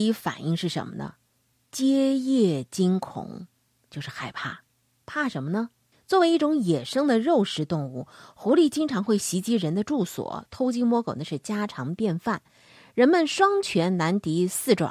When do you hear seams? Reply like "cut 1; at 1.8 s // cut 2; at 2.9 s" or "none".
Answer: cut 1; at 5.9 s